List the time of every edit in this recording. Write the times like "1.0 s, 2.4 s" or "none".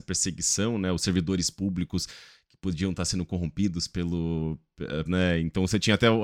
5.1 s